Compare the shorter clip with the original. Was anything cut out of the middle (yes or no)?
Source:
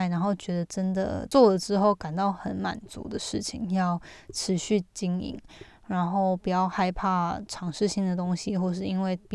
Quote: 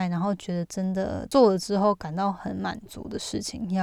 no